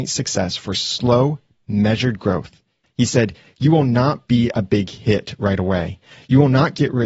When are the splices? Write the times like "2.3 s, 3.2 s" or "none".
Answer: 2.8 s